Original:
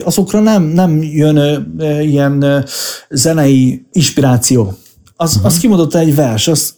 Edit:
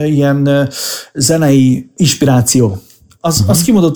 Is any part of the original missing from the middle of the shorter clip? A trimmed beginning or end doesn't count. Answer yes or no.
no